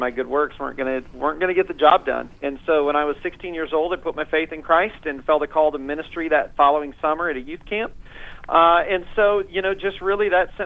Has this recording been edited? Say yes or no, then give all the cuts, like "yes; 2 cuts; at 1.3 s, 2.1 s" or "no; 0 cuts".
no; 0 cuts